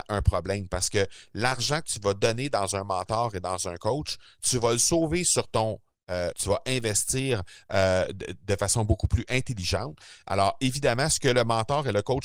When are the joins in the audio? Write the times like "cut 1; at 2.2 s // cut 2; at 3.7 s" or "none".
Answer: cut 1; at 6.3 s

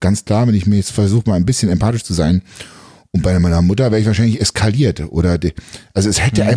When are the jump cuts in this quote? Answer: none

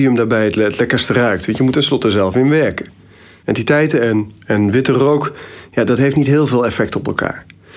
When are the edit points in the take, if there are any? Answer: cut 1; at 1.7 s // cut 2; at 3.4 s

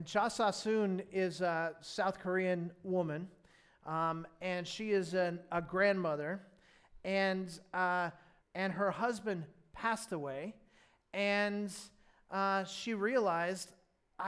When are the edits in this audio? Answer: cut 1; at 8.4 s

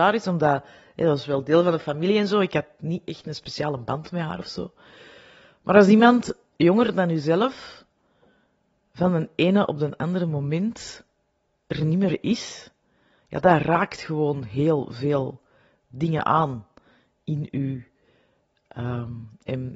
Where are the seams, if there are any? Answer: none

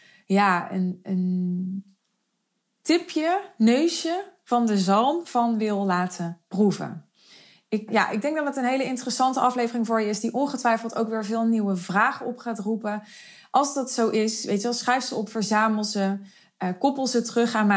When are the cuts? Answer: cut 1; at 7.9 s

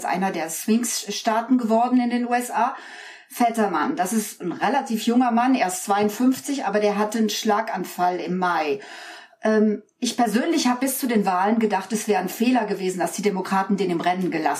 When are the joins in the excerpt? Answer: none

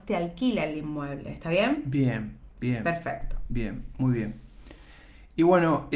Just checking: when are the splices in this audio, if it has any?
none

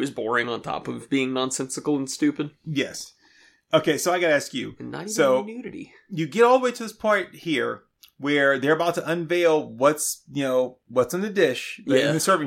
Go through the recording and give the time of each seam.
none

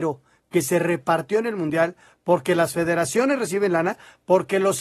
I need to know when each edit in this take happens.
none

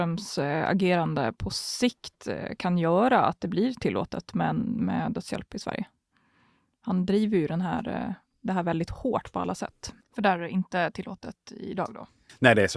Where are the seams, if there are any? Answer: cut 1; at 10.0 s

